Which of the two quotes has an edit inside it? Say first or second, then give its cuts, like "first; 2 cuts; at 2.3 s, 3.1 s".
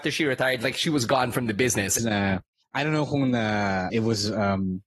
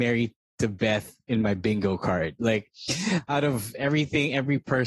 first; 2 cuts; at 2.0 s, 3.9 s